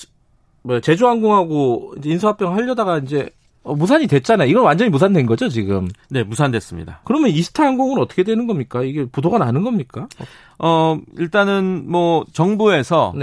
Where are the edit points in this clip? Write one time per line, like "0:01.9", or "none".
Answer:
none